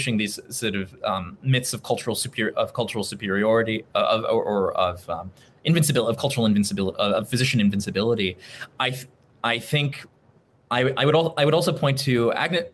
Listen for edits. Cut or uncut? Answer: uncut